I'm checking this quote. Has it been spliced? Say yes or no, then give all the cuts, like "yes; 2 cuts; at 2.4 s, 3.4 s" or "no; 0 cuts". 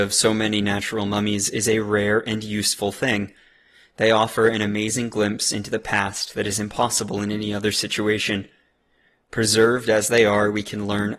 no; 0 cuts